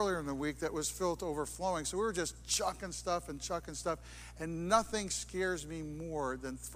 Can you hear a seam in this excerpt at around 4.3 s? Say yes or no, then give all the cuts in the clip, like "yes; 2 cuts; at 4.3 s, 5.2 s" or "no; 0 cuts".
no; 0 cuts